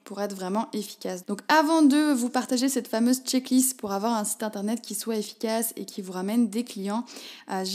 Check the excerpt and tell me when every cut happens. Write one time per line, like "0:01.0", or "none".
0:01.2